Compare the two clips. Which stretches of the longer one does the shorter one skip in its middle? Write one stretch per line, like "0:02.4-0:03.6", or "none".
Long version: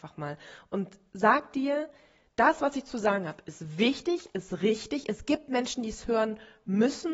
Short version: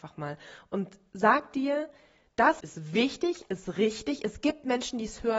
0:02.6-0:03.4